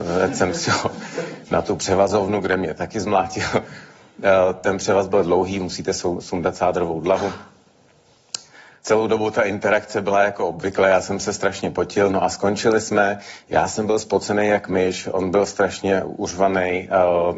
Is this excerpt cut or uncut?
uncut